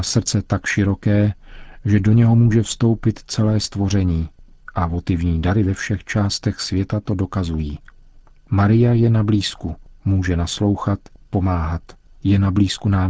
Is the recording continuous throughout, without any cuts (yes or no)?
yes